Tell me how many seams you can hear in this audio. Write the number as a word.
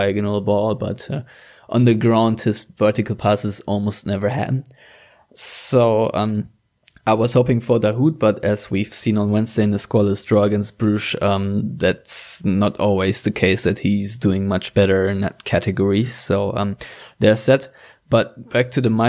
zero